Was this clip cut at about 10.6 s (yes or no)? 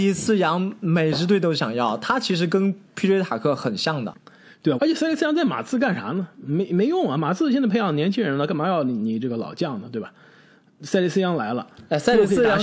no